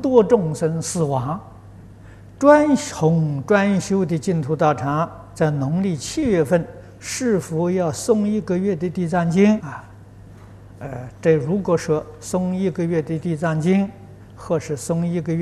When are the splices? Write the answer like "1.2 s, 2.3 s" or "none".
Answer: 2.4 s, 9.6 s